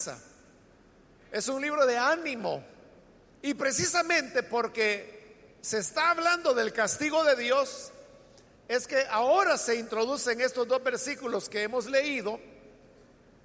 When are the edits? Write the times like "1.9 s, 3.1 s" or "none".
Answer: 3.3 s